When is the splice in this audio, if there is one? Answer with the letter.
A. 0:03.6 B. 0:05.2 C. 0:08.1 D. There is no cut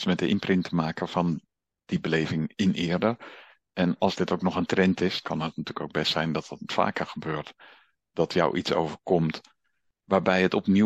B